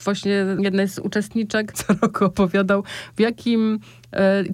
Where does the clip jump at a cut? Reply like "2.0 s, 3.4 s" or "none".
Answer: 1.7 s